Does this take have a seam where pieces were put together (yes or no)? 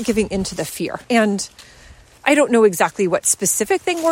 yes